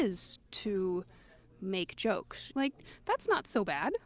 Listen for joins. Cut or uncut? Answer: cut